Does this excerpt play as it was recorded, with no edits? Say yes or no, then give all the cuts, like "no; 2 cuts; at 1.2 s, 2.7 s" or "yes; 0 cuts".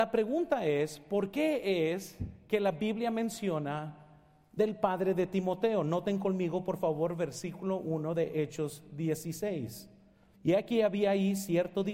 no; 1 cut; at 10.4 s